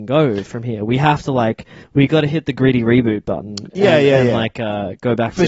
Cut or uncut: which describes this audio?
uncut